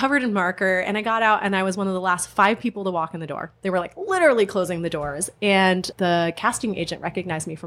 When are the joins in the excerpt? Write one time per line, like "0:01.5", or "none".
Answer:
0:05.9

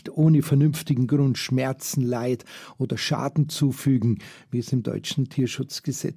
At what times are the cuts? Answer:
none

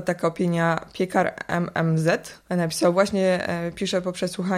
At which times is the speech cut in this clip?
0:02.5

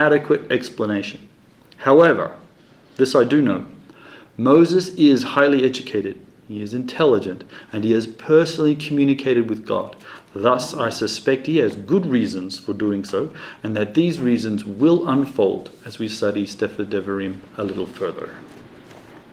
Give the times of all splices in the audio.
none

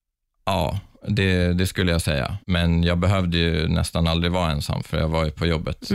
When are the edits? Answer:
0:02.4

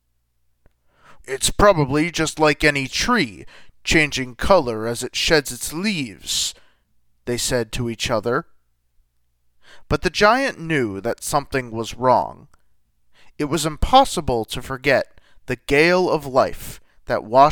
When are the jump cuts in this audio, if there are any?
0:01.2

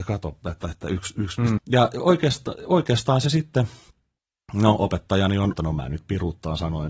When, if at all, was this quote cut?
0:01.6
0:05.5

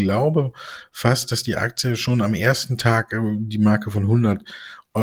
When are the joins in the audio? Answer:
none

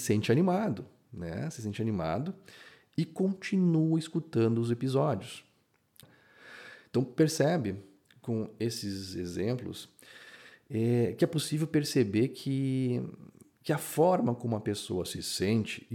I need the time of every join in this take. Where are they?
0:06.0

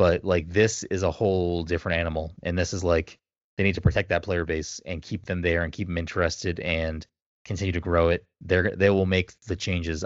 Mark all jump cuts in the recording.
none

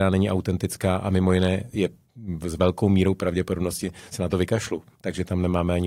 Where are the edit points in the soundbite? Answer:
none

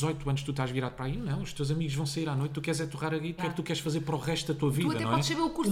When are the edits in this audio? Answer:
0:03.4

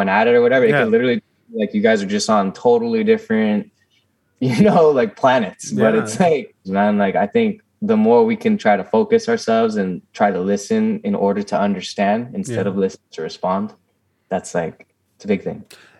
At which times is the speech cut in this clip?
0:06.6
0:13.1

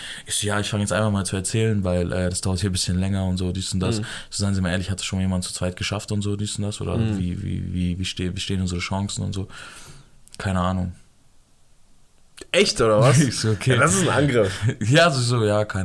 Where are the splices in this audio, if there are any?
none

